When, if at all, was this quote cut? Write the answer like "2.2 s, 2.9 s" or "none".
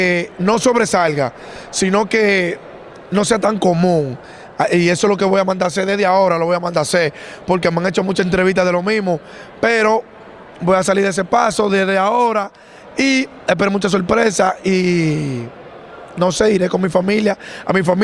none